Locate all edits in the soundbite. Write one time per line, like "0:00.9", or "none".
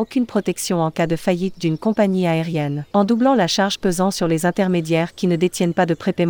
0:02.9